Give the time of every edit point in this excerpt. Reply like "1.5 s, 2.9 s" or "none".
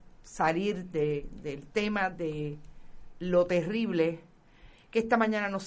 none